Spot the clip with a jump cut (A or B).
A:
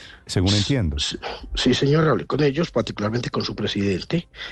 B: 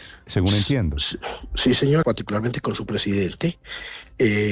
B